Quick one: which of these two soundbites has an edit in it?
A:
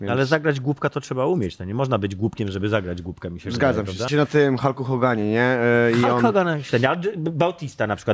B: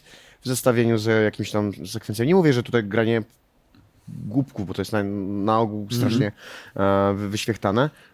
A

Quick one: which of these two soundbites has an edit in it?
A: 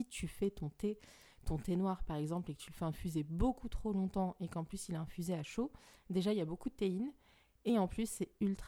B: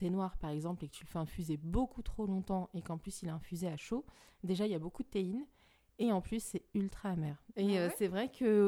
B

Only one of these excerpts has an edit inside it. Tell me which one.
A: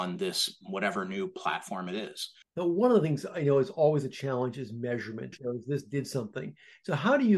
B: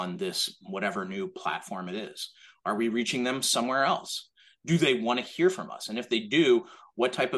A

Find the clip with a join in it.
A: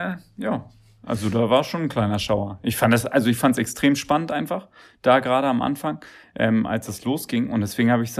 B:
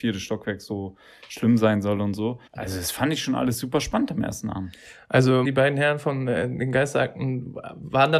B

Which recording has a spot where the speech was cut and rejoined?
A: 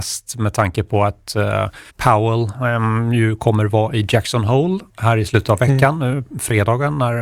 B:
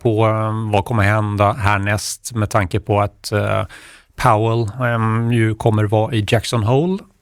A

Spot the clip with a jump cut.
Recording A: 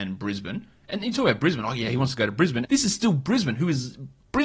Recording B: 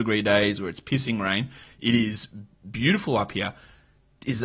A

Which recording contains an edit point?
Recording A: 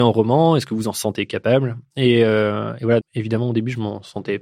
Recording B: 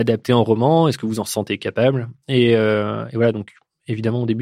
A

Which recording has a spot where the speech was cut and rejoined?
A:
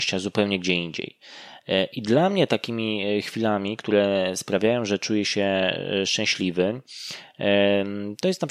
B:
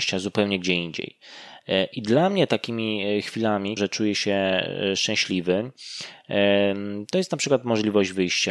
B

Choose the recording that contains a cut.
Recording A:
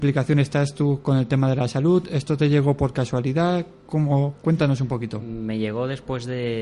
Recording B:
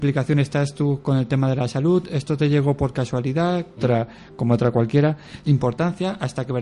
B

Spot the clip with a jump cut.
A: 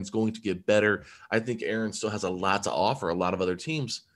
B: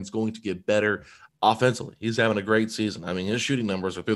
B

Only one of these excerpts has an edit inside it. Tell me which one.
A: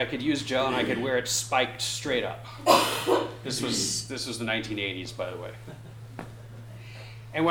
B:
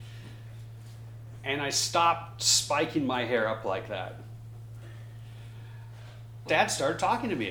B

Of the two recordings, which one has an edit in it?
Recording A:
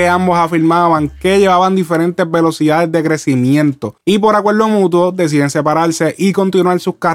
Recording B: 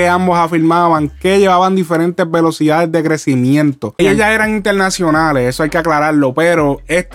B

